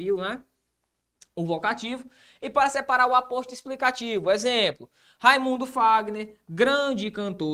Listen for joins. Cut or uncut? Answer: uncut